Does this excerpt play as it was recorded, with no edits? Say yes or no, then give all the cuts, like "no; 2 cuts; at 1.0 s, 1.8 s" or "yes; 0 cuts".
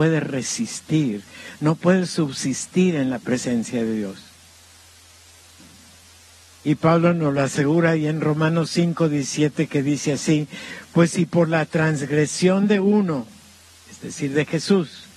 yes; 0 cuts